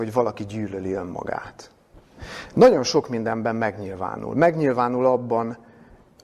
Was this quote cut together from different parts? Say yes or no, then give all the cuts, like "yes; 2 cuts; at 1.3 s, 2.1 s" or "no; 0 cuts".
no; 0 cuts